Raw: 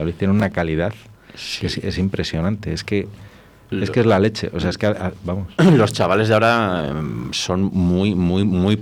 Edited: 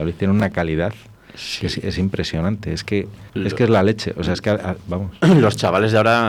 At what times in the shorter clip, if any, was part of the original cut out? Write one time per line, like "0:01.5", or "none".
0:03.3